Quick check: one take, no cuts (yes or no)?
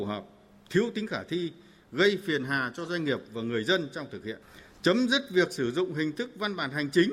yes